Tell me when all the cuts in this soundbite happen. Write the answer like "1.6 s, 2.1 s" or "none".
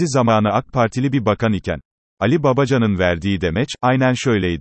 none